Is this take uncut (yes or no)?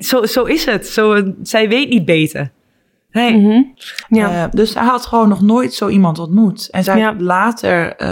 no